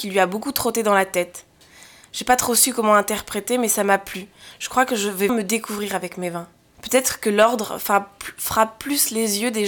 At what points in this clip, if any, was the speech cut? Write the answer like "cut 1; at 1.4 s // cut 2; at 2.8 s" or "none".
cut 1; at 5.3 s // cut 2; at 6.7 s